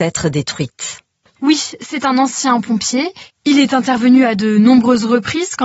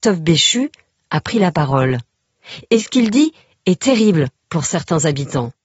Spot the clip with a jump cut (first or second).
first